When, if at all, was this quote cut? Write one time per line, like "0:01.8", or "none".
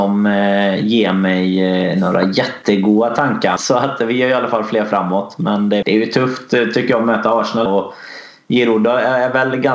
0:03.6
0:05.8
0:07.7